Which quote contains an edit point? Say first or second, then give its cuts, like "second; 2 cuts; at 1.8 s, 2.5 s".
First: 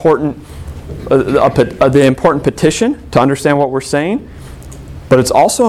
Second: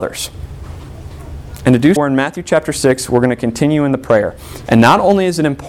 second; 2 cuts; at 2.0 s, 4.7 s